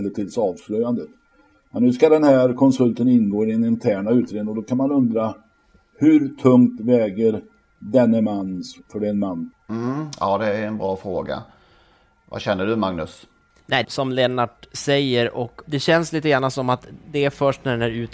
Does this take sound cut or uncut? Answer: cut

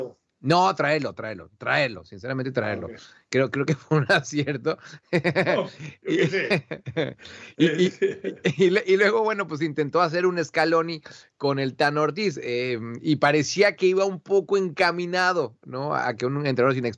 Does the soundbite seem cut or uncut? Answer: uncut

